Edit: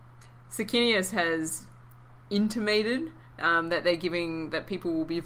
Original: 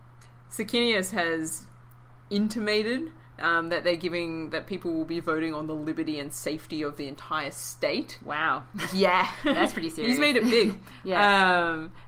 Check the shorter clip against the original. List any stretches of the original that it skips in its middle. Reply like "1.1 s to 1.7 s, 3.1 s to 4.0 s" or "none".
none